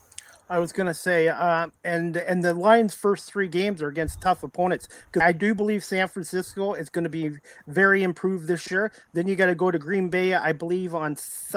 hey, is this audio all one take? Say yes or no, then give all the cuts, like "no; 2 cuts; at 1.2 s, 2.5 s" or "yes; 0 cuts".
no; 1 cut; at 5.2 s